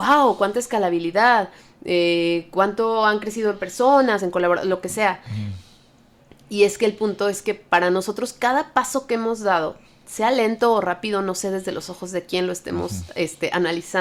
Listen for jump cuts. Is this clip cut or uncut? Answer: uncut